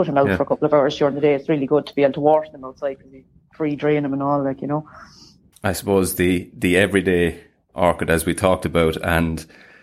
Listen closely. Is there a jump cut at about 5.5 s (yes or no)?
yes